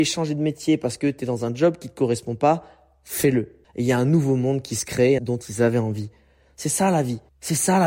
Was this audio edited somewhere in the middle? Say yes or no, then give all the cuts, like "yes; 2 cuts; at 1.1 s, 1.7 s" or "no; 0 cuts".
yes; 2 cuts; at 3.6 s, 5.2 s